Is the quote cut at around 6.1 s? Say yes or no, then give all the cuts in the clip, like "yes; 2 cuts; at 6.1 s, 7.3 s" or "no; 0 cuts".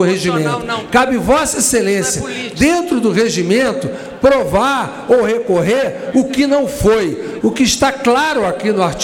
yes; 2 cuts; at 6.1 s, 7.4 s